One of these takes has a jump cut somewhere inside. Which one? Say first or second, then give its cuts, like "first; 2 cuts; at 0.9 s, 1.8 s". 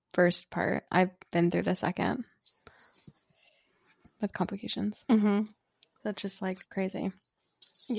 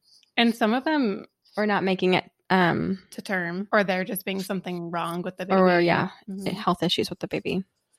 second; 1 cut; at 3.7 s